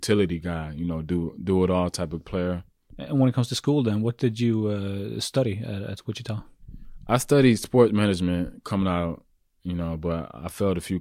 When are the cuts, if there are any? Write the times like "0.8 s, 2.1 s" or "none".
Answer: 2.9 s